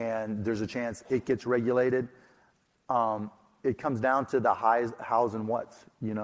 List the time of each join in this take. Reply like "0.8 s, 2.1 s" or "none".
none

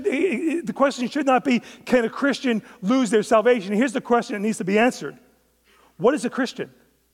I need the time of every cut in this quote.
none

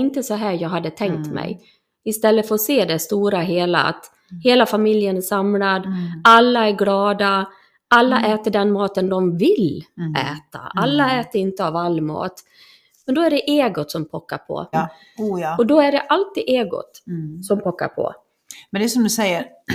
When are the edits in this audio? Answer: 14.7 s

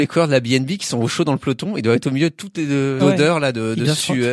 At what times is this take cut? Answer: 3.0 s

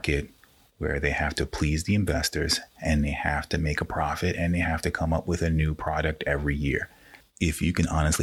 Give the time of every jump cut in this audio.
7.2 s

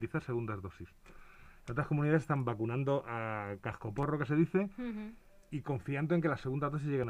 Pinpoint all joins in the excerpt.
none

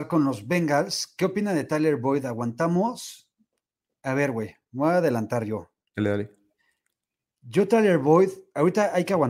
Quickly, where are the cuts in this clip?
none

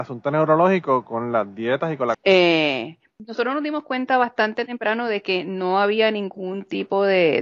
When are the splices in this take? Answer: 2.1 s

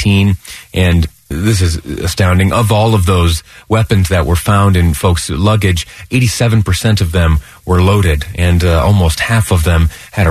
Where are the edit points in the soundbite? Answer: none

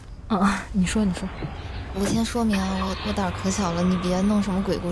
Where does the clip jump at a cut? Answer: none

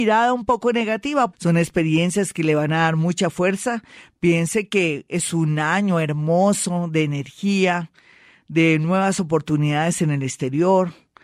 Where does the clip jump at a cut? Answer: 1.3 s

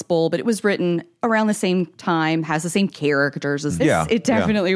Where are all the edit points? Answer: 3.8 s

